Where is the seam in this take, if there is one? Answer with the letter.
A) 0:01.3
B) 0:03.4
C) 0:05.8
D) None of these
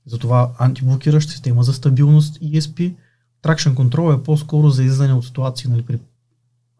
A